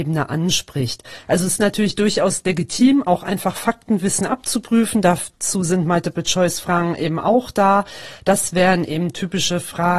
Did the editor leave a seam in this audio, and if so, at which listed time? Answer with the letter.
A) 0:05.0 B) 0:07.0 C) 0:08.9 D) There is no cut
D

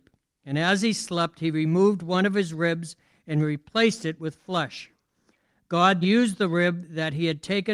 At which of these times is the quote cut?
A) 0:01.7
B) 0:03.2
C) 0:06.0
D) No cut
C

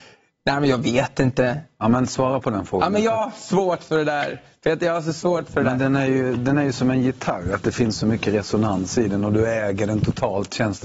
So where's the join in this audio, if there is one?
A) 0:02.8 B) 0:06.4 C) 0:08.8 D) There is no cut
D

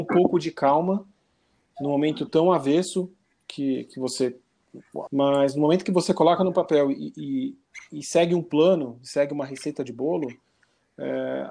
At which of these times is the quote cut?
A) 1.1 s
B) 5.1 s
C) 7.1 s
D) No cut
B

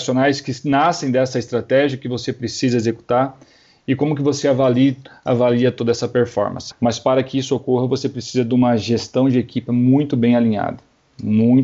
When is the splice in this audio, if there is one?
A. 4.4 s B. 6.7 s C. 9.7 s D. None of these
B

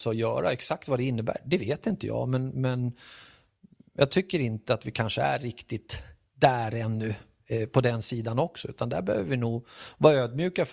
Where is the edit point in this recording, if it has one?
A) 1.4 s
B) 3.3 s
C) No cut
C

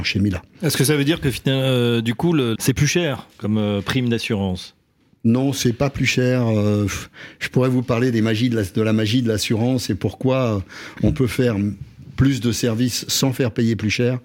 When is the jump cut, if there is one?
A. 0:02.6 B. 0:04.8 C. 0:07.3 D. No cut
A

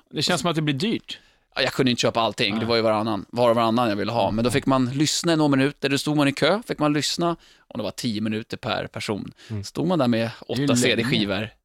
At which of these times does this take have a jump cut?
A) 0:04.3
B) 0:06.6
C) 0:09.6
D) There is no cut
D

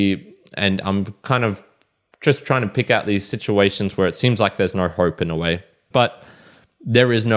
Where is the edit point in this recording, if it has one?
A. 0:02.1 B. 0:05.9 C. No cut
B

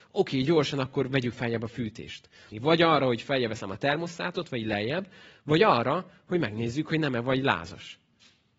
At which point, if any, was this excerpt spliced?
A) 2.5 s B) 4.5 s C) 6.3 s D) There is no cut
A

